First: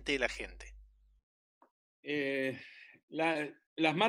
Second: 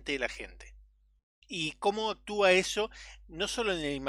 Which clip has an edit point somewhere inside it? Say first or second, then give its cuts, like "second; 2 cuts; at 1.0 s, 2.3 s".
second; 1 cut; at 1.4 s